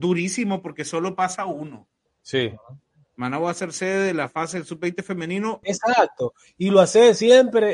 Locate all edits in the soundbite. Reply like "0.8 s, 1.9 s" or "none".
2.1 s, 5.6 s